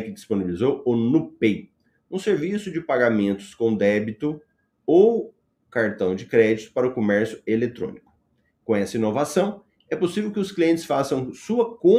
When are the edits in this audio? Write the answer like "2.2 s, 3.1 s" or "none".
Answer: none